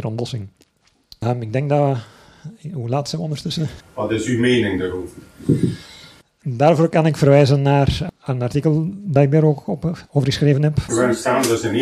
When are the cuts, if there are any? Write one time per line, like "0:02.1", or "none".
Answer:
0:01.2
0:03.8
0:10.9